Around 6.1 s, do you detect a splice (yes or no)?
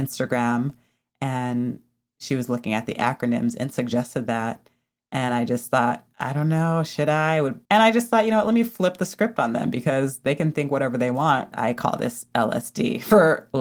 no